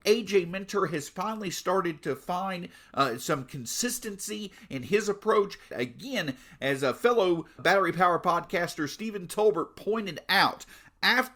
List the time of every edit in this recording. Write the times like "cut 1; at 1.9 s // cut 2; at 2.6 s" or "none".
cut 1; at 5.7 s // cut 2; at 7.6 s

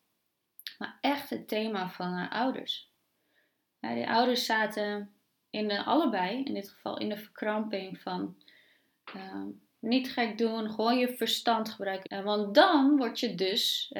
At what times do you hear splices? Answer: cut 1; at 12.0 s

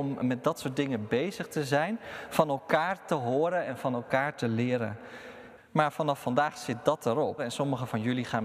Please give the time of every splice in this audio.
cut 1; at 5.6 s // cut 2; at 7.4 s

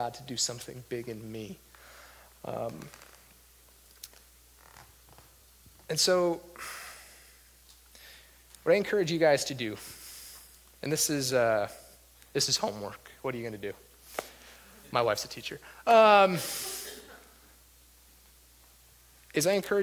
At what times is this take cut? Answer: none

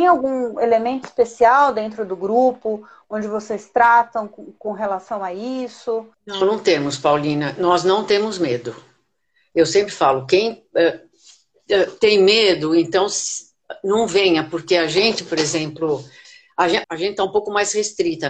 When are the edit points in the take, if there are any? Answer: cut 1; at 6.1 s // cut 2; at 16.8 s

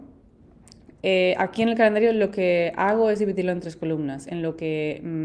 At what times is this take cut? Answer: cut 1; at 0.9 s

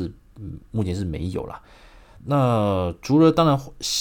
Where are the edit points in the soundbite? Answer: cut 1; at 2.2 s

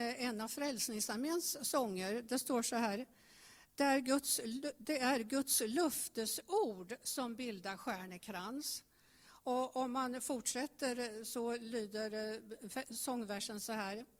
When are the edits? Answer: none

